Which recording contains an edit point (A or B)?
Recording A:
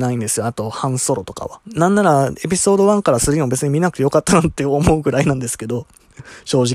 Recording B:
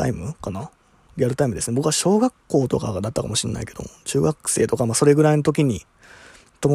A